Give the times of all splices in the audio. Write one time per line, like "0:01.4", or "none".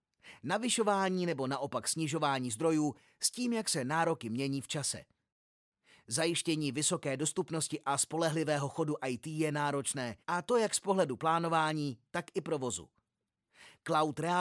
0:10.2
0:12.1